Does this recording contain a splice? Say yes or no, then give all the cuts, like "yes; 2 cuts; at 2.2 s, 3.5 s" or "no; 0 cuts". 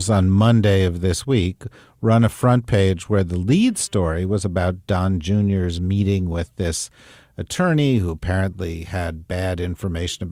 no; 0 cuts